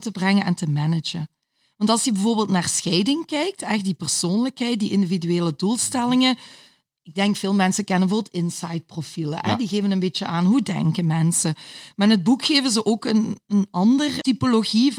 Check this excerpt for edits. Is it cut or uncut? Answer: uncut